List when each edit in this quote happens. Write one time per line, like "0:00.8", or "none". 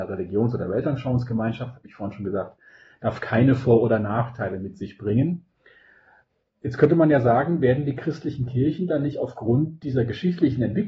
none